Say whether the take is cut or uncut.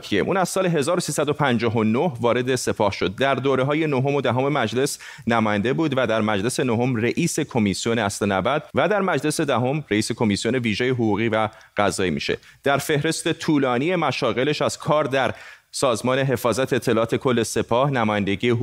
cut